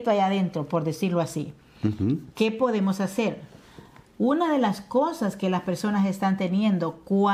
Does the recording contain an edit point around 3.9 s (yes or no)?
no